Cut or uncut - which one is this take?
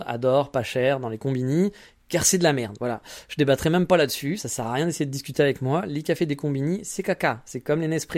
uncut